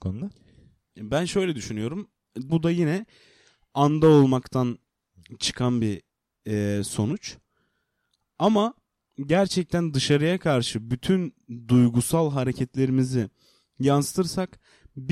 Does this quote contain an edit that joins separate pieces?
yes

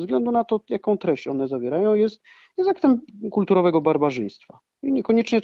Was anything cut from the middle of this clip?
no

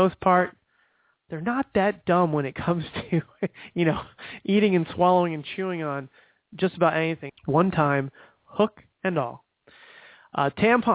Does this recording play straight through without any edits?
no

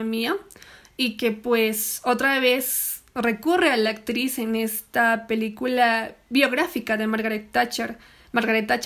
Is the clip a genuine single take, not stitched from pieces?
yes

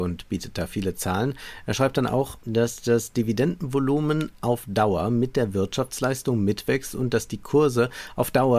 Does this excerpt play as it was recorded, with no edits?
no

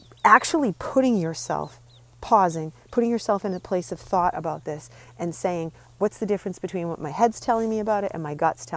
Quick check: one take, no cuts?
yes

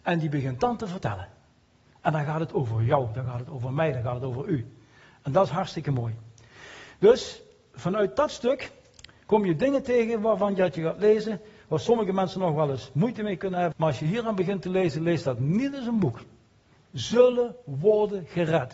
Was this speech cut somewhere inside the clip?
yes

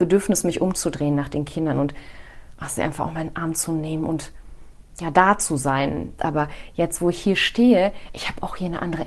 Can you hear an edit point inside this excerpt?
yes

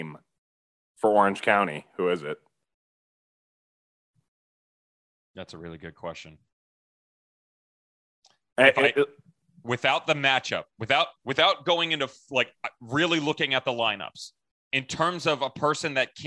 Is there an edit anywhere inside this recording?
yes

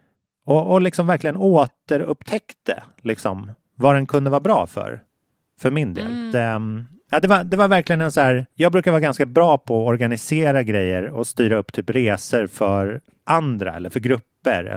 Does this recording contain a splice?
yes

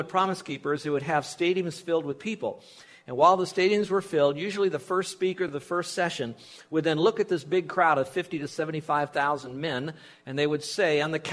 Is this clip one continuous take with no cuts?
yes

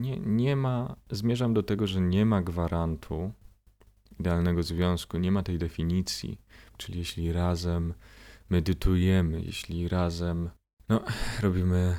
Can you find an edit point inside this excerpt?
yes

